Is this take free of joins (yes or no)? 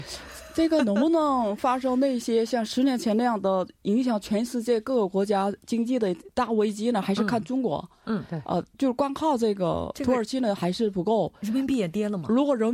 yes